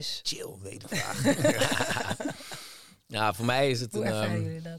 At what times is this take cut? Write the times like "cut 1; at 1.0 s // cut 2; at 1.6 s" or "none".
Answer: none